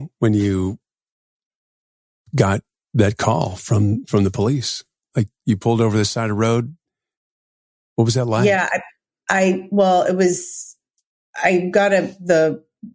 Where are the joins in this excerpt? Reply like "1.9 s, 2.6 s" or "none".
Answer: none